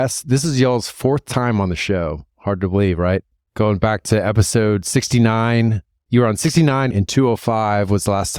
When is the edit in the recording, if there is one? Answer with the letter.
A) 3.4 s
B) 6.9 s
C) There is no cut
B